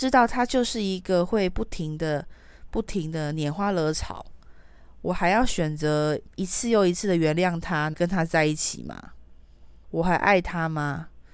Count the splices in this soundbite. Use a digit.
2